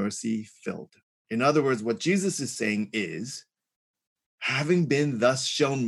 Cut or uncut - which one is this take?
cut